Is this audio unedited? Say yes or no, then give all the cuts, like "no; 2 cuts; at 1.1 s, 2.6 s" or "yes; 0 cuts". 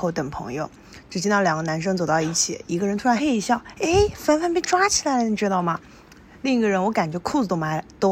no; 1 cut; at 3.2 s